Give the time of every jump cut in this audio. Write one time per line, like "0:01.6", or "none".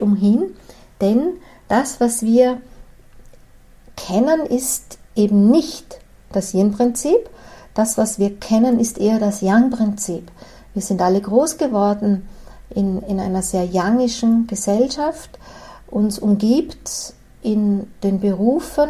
none

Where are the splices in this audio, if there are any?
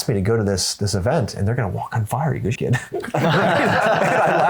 0:02.6

